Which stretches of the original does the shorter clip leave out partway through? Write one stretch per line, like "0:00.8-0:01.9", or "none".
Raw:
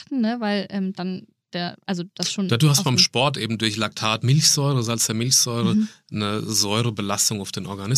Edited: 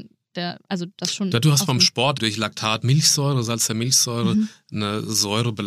0:03.4-0:03.6